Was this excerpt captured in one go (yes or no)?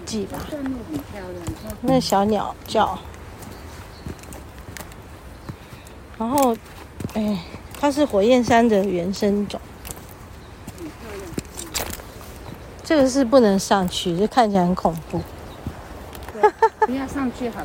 yes